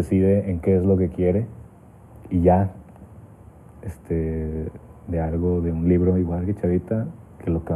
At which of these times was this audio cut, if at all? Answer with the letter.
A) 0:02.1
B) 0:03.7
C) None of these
A